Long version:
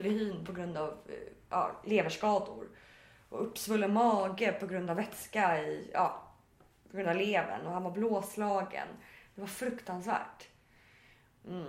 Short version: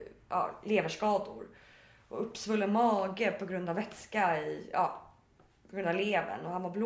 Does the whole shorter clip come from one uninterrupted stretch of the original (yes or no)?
yes